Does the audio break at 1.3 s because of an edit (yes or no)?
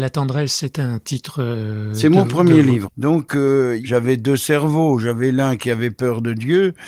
no